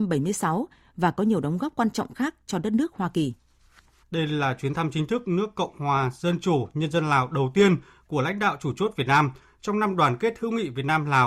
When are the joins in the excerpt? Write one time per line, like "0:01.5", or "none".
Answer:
0:04.0